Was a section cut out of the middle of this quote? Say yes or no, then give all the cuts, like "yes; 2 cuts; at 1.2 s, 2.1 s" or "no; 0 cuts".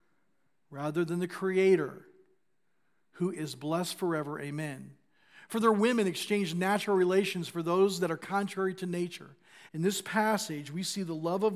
yes; 2 cuts; at 5.5 s, 9.7 s